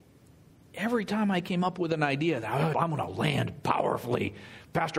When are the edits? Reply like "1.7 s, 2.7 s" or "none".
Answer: 2.7 s